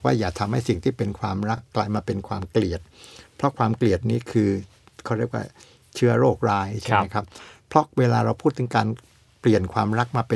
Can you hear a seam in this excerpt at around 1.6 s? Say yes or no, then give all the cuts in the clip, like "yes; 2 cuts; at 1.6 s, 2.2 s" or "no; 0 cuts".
no; 0 cuts